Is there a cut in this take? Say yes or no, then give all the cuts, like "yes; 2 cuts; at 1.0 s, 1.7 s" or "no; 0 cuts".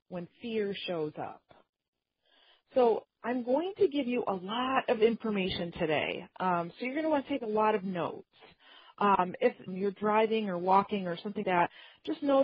yes; 2 cuts; at 9.7 s, 11.4 s